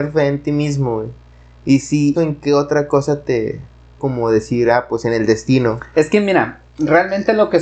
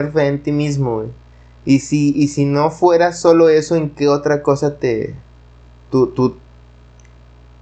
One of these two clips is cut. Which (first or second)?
first